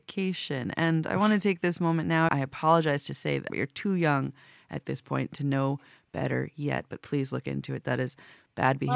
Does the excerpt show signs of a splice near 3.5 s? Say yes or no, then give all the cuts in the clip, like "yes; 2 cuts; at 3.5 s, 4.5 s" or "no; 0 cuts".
yes; 2 cuts; at 2.3 s, 3.5 s